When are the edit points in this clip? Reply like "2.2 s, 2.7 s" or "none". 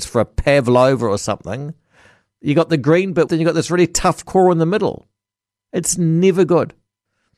3.3 s

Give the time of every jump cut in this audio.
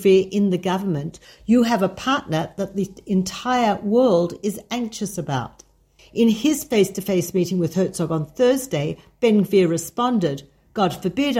1.2 s, 6.0 s

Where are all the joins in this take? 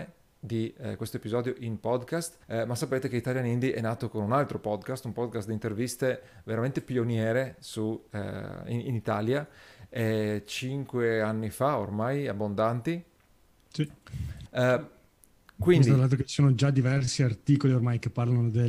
2.4 s, 14.5 s

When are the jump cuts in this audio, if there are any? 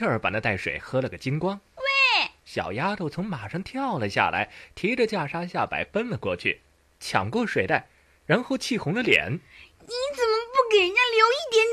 2.4 s

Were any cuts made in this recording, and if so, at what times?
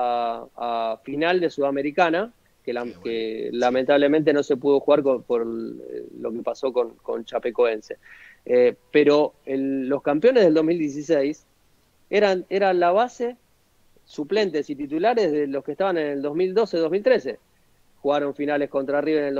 none

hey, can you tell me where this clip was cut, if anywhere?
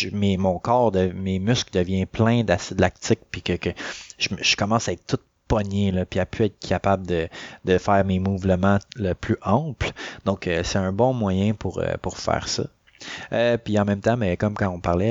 none

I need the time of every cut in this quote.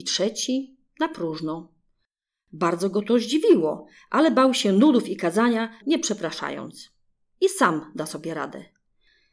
5.8 s

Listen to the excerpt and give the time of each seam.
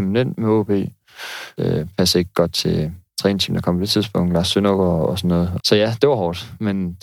1.6 s, 5.6 s

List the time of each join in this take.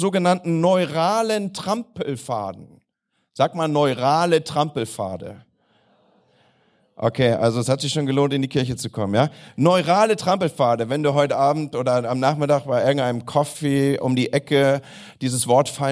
none

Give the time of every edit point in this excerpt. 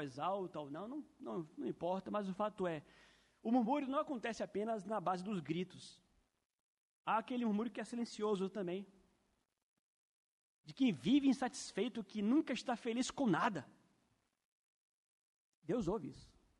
none

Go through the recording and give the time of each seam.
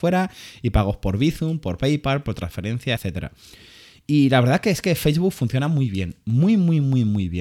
3.0 s

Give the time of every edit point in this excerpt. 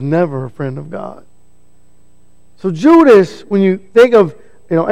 none

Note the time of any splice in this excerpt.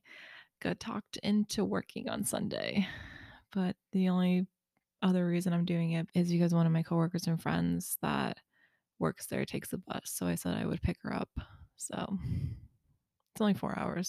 6.1 s

